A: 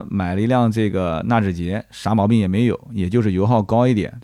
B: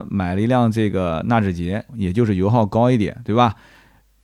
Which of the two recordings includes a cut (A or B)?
B